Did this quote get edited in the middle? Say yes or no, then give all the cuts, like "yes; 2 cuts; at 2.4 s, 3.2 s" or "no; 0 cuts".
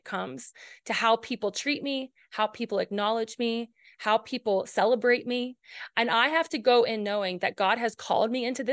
no; 0 cuts